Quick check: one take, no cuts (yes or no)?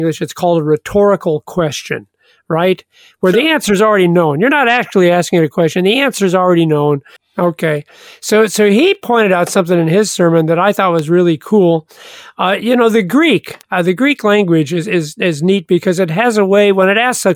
no